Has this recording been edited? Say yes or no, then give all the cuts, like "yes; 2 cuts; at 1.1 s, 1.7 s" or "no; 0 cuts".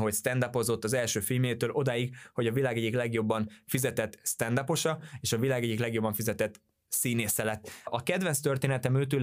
yes; 1 cut; at 7.9 s